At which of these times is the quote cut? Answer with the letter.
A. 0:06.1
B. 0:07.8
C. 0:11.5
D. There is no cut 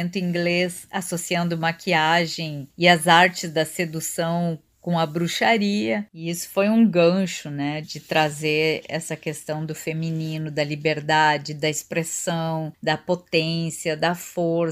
B